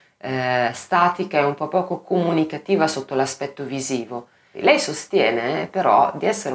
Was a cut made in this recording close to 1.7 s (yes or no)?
no